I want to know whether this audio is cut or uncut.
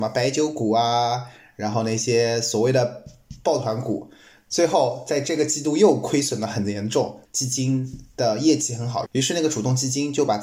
cut